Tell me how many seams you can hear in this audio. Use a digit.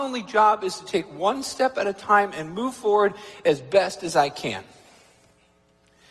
0